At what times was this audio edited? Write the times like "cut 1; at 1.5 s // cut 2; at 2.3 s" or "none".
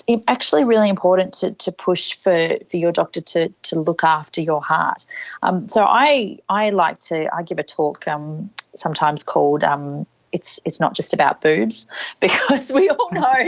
none

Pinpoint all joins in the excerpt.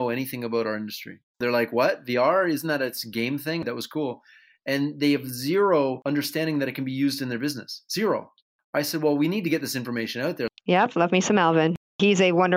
cut 1; at 3.6 s // cut 2; at 10.6 s

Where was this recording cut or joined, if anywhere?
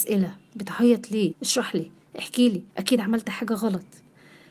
cut 1; at 1.3 s // cut 2; at 2.7 s

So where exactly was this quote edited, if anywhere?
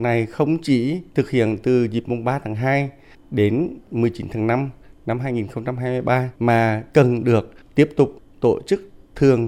cut 1; at 1.1 s // cut 2; at 6.4 s

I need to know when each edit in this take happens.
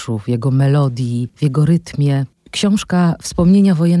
cut 1; at 2.4 s

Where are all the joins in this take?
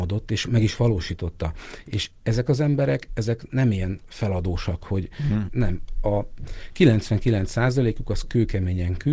cut 1; at 5.5 s

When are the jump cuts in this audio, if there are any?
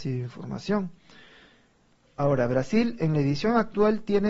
none

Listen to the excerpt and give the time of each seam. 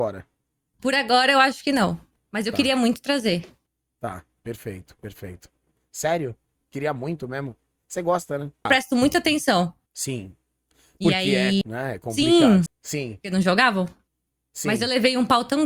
cut 1; at 8.7 s // cut 2; at 11.6 s // cut 3; at 12.7 s

